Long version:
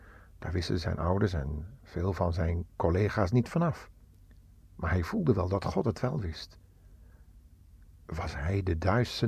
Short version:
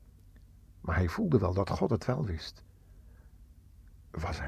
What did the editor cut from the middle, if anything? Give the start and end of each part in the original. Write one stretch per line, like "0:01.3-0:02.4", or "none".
none